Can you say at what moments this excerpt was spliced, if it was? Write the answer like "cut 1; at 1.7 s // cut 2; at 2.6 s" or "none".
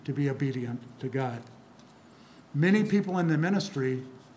none

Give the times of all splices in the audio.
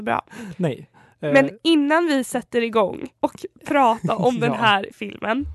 cut 1; at 3.2 s

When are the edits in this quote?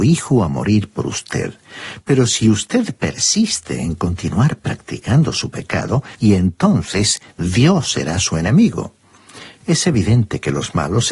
cut 1; at 6.1 s // cut 2; at 9.6 s

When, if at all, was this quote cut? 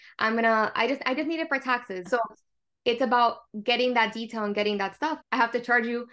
cut 1; at 2.1 s // cut 2; at 5.2 s

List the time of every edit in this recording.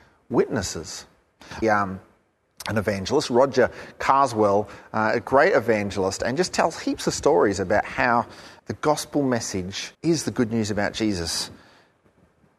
cut 1; at 1.6 s // cut 2; at 8.6 s // cut 3; at 9.9 s

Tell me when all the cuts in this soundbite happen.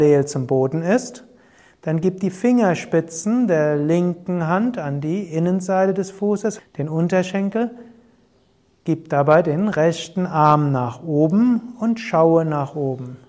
cut 1; at 6.6 s

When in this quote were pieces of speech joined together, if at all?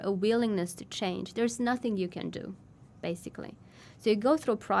none

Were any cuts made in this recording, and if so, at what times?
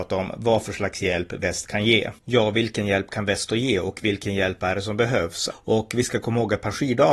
cut 1; at 2.2 s // cut 2; at 5.5 s

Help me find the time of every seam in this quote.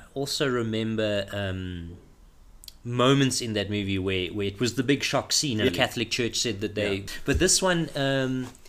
cut 1; at 5.7 s // cut 2; at 7.1 s

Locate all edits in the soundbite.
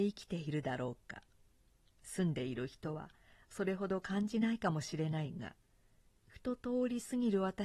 none

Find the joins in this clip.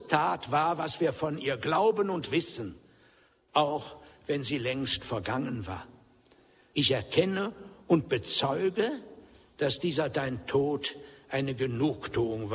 cut 1; at 3.5 s // cut 2; at 6.7 s

